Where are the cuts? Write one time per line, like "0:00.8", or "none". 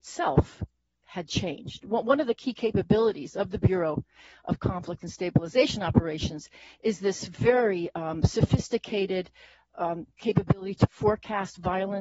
none